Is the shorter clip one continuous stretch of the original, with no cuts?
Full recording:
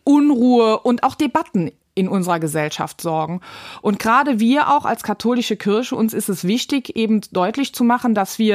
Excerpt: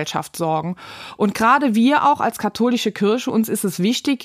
yes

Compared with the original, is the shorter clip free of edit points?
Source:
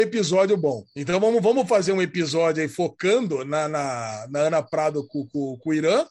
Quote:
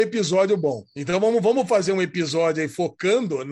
yes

